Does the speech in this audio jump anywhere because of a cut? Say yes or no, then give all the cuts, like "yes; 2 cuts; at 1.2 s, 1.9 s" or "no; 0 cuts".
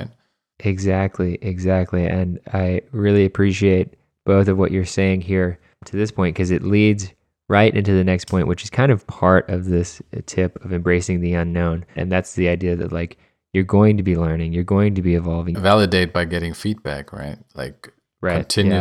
yes; 2 cuts; at 12.0 s, 15.5 s